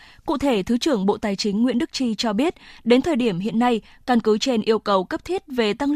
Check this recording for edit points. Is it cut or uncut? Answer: uncut